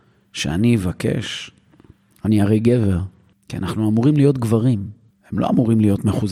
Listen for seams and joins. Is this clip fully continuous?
no; 2 cuts; at 3.3 s, 5.1 s

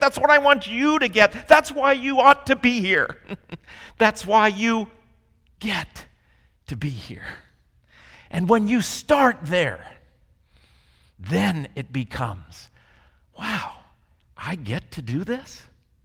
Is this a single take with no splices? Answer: yes; 0 cuts

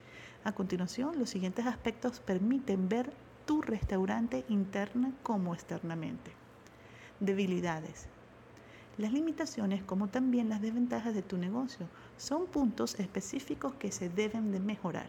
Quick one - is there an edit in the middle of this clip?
yes; 1 cut; at 8.9 s

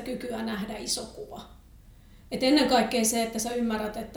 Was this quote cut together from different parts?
no; 0 cuts

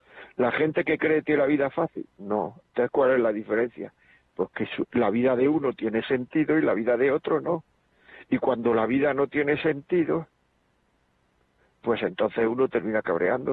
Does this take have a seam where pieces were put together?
no; 0 cuts

